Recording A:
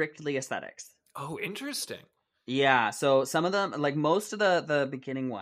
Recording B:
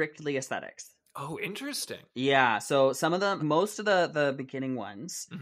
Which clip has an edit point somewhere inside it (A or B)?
B